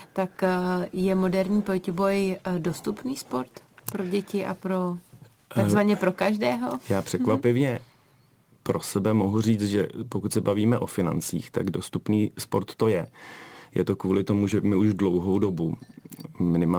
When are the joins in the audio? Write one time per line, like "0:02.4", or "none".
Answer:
none